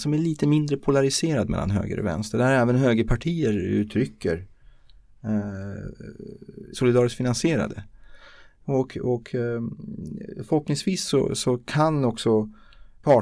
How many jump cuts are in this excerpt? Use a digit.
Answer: 1